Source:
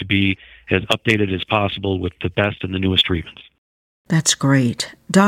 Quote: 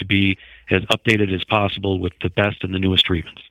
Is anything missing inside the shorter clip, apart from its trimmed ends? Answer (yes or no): no